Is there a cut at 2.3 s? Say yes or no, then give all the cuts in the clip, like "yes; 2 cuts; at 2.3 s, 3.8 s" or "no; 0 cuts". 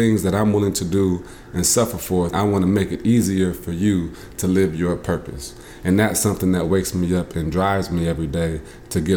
yes; 1 cut; at 2.3 s